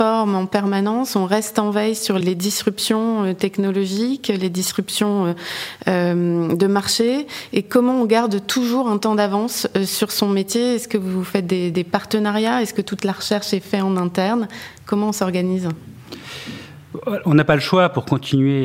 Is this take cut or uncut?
cut